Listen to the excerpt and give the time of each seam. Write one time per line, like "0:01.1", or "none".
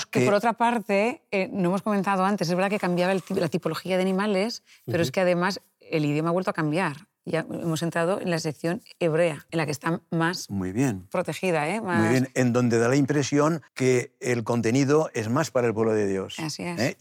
0:09.5
0:13.7